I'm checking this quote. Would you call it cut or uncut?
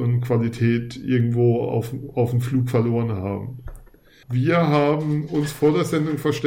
cut